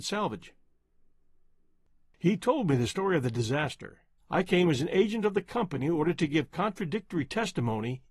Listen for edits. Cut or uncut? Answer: cut